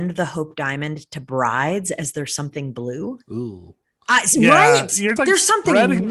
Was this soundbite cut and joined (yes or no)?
yes